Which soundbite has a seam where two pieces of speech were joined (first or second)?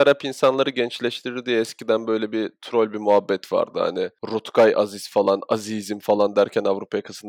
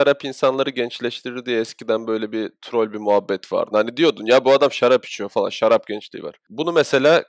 second